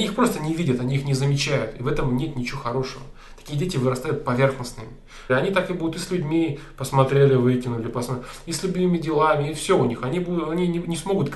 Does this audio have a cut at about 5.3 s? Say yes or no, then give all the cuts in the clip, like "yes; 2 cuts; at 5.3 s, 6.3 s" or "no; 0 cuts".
yes; 1 cut; at 5.3 s